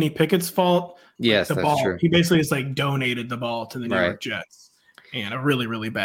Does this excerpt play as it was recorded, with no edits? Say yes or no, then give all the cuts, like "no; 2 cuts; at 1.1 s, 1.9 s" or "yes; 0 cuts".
no; 1 cut; at 1.2 s